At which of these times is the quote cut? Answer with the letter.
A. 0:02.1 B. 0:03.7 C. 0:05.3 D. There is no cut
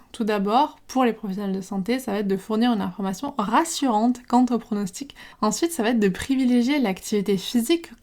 C